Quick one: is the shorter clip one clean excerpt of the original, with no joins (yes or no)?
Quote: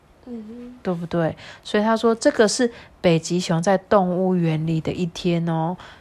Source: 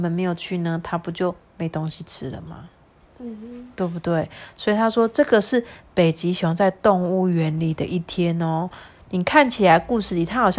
yes